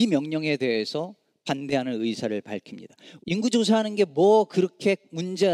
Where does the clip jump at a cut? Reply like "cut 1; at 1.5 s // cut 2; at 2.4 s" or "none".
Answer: cut 1; at 3.2 s